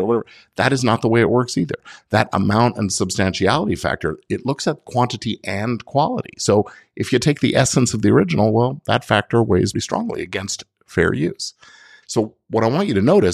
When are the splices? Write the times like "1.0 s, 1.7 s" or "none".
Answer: 9.7 s, 12.0 s